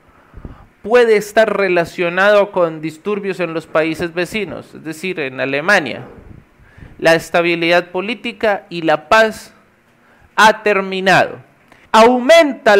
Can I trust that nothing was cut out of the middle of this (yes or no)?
yes